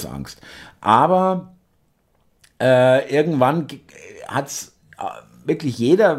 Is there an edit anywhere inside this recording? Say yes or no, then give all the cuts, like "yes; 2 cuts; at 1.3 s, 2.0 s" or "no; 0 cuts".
no; 0 cuts